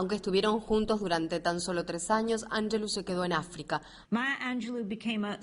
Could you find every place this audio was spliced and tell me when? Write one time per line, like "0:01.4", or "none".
0:04.0